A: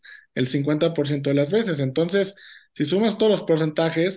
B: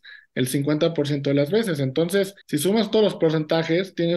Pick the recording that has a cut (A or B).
B